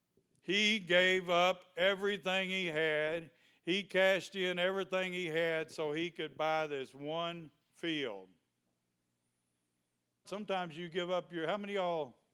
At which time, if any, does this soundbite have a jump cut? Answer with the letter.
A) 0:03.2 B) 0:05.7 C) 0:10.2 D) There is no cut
C